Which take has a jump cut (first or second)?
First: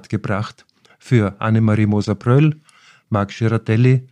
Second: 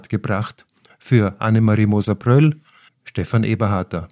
second